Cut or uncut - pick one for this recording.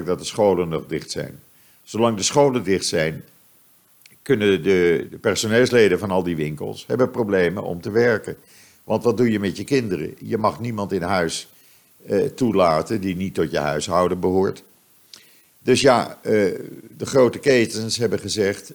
cut